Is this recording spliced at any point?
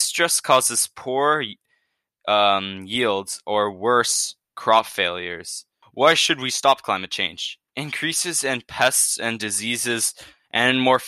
yes; 1 cut; at 5.8 s

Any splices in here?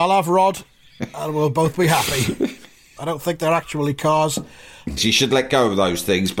yes; 2 cuts; at 3.0 s, 5.0 s

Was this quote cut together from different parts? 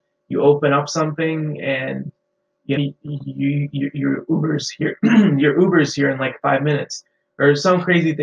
yes; 1 cut; at 2.8 s

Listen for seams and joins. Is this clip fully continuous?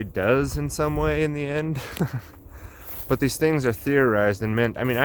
yes; 0 cuts

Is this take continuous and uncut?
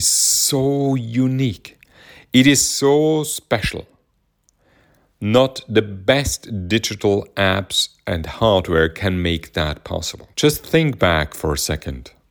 no; 1 cut; at 10.3 s

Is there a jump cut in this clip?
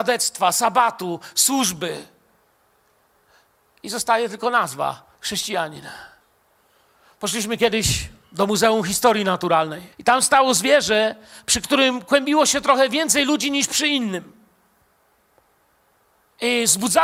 yes; 1 cut; at 9.9 s

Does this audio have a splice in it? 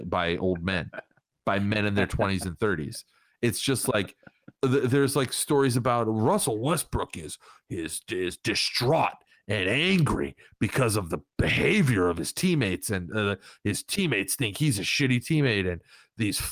no; 0 cuts

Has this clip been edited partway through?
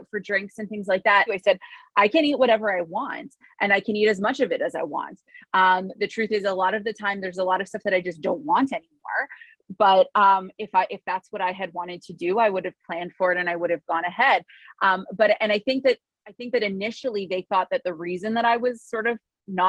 yes; 1 cut; at 1.3 s

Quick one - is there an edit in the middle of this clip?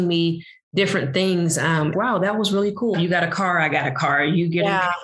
yes; 2 cuts; at 1.9 s, 2.9 s

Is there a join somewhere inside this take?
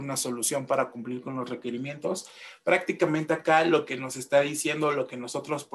no; 0 cuts

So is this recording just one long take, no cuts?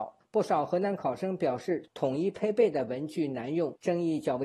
yes; 0 cuts

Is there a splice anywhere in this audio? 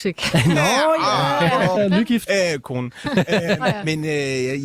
yes; 1 cut; at 1.8 s

